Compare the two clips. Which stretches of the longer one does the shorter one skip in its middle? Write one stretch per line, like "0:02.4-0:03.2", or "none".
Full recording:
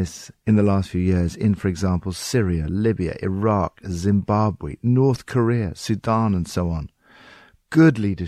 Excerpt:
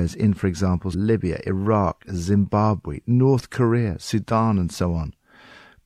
0:02.1-0:02.7